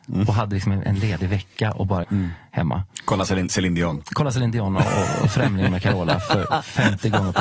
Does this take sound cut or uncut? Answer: cut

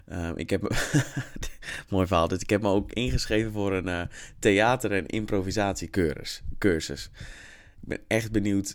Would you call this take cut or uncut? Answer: uncut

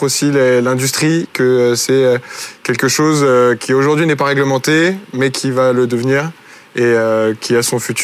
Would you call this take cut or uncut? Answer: uncut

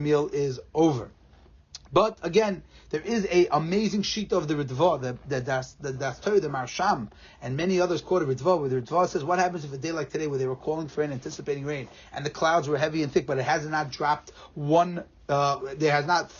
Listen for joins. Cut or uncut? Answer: uncut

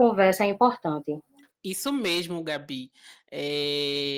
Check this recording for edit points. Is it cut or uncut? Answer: uncut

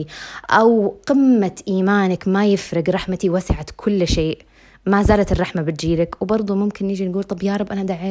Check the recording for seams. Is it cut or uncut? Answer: uncut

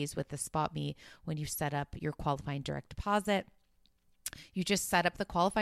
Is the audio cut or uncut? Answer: uncut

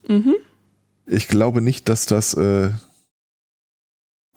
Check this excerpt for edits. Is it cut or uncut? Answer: uncut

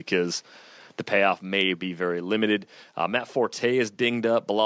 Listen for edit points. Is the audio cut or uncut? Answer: uncut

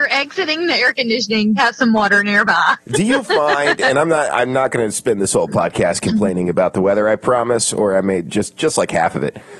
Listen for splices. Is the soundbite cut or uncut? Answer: cut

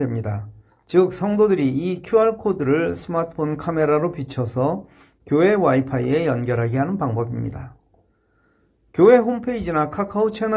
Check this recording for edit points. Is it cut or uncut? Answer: uncut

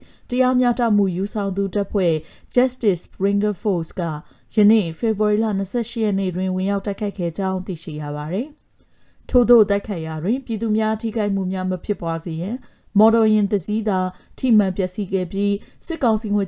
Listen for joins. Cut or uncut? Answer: uncut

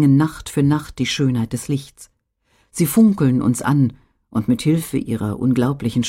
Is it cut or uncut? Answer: uncut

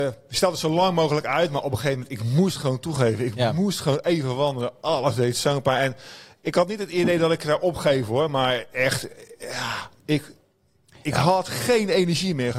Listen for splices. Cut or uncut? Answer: uncut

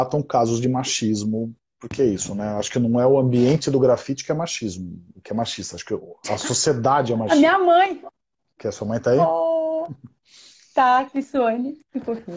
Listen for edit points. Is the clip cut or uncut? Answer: uncut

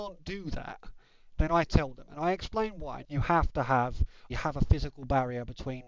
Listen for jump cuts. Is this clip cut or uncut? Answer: cut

